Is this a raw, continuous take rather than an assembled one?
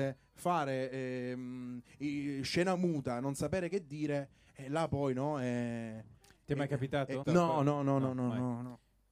no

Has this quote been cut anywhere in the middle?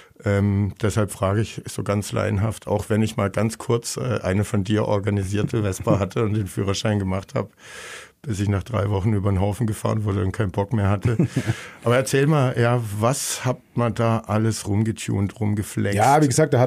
no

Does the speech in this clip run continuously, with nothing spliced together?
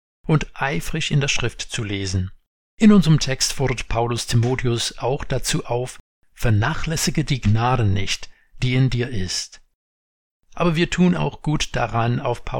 no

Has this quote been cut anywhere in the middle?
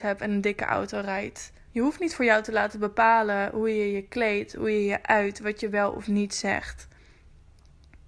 yes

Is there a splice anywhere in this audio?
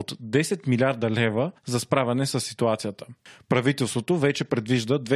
no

